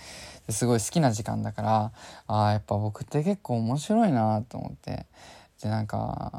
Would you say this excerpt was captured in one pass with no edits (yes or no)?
yes